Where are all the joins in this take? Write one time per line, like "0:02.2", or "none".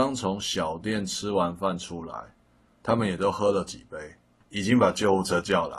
0:04.4